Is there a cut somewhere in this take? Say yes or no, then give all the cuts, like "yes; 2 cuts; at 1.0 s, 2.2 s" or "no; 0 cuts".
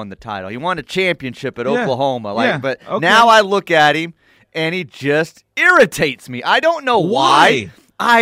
no; 0 cuts